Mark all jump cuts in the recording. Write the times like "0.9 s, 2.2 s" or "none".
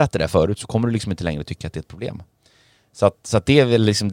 none